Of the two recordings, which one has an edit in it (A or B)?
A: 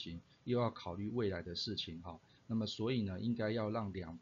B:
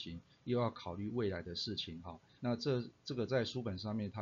B